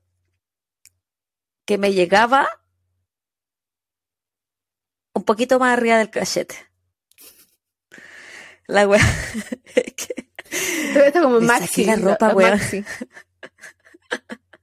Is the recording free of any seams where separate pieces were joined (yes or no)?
yes